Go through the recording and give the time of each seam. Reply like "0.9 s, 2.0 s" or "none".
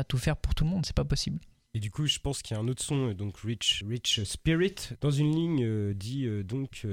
3.8 s, 5.0 s